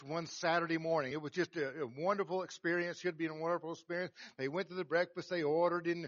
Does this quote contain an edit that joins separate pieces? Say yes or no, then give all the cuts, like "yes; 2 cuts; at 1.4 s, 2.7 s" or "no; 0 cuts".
no; 0 cuts